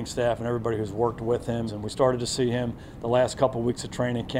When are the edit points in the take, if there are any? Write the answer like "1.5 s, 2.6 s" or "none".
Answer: 1.7 s